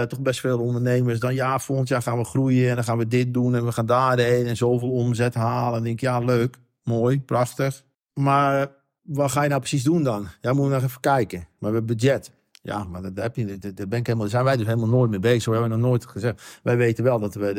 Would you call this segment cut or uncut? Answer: uncut